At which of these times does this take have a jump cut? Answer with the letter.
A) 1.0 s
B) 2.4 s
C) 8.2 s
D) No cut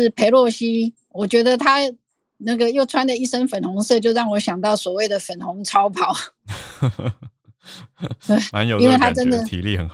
A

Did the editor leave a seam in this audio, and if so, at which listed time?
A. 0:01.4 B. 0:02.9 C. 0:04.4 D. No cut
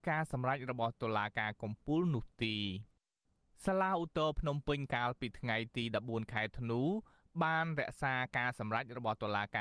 D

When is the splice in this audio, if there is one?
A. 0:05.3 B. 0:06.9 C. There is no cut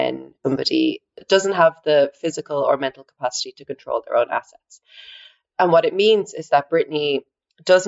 C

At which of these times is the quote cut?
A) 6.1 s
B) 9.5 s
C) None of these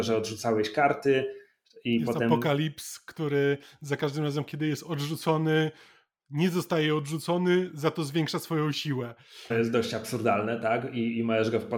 B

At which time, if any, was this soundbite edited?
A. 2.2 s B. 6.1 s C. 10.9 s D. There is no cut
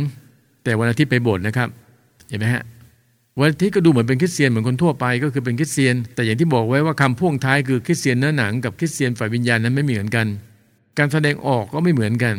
B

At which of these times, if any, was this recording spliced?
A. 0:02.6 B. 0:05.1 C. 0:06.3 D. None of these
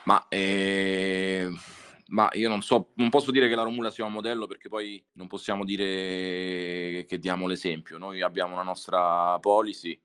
B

